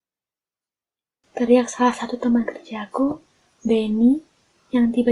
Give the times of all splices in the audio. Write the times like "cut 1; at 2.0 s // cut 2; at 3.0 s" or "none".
none